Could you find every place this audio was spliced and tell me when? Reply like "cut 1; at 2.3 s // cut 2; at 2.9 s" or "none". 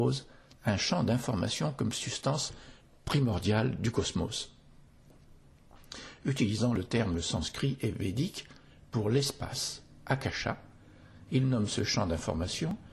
none